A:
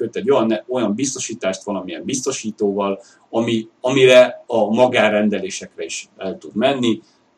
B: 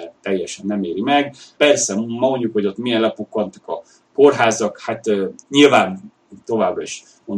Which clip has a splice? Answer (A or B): B